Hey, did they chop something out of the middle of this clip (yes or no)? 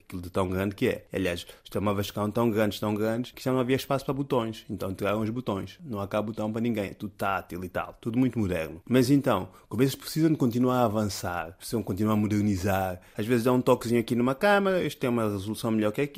no